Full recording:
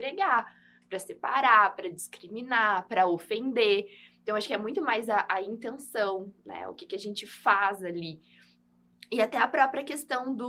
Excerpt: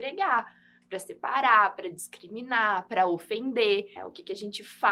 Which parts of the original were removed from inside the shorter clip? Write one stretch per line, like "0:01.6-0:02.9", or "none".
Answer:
0:04.0-0:06.6